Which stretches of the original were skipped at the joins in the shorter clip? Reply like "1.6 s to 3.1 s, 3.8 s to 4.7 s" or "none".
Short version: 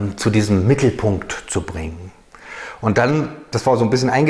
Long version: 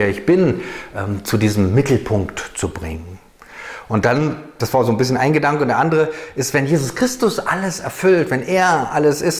none